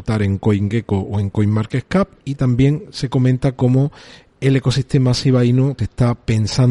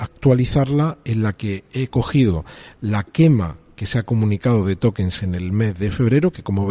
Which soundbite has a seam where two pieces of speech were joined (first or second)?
first